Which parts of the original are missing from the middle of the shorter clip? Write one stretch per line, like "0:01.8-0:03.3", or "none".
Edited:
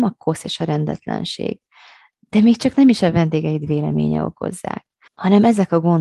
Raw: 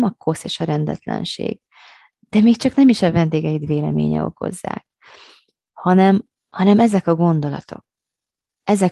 0:05.1-0:06.4